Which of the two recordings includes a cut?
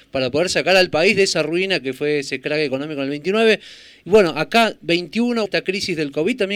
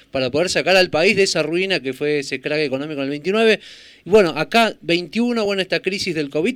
first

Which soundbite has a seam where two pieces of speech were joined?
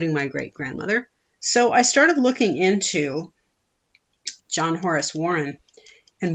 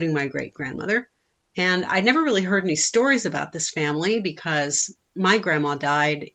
first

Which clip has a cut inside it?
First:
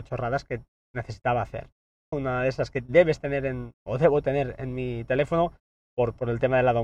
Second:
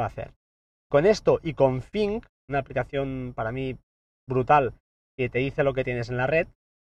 first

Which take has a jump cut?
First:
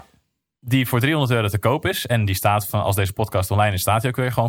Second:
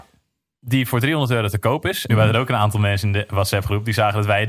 second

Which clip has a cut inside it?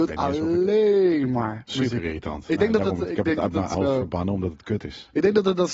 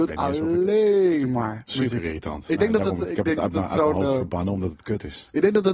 first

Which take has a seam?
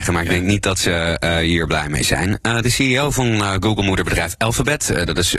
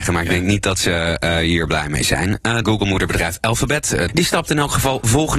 second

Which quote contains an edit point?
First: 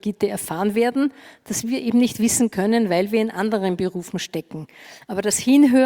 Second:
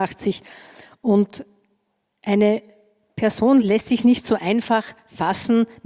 second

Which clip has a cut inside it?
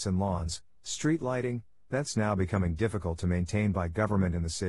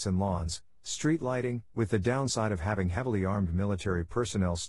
second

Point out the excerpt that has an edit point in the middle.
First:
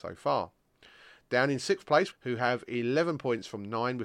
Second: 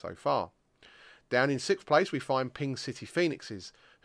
first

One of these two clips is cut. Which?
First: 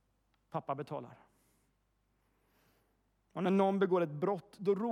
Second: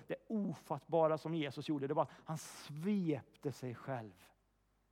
second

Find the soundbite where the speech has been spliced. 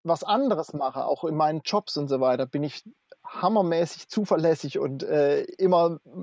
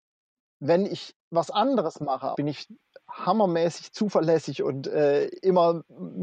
second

